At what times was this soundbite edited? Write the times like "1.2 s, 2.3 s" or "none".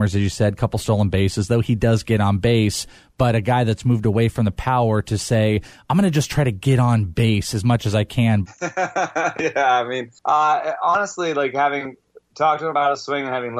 8.4 s